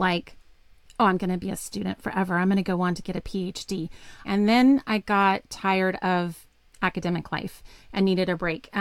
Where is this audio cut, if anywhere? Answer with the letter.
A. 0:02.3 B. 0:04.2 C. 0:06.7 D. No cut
B